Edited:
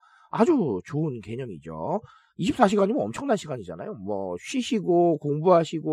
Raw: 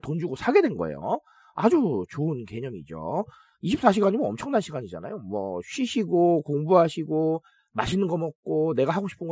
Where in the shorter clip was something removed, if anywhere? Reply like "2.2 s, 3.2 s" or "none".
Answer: none